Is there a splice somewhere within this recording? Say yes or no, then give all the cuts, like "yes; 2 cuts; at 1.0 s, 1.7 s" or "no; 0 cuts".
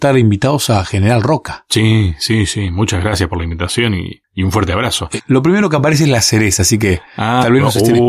yes; 1 cut; at 5.2 s